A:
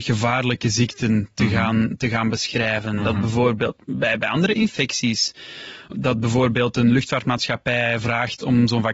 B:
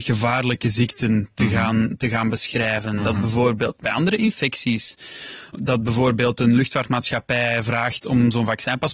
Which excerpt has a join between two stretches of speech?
B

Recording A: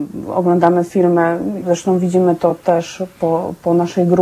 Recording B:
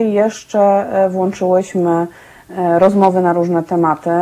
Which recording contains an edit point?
A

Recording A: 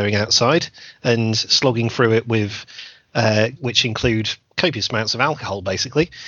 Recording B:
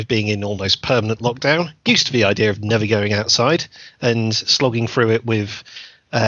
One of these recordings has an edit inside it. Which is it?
A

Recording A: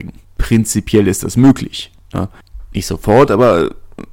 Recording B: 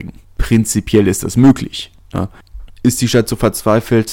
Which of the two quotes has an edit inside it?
B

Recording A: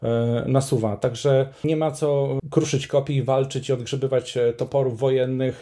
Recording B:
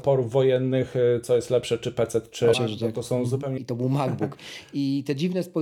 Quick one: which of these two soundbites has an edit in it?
B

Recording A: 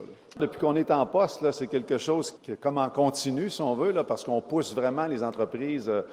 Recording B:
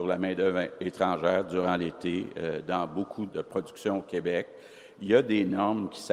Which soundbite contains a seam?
B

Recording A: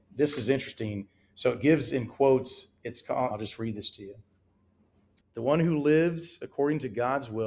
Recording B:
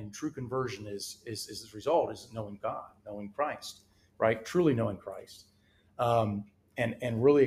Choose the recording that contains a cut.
A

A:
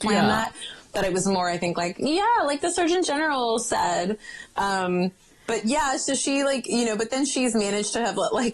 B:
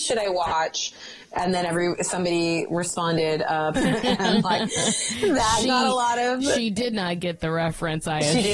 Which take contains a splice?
B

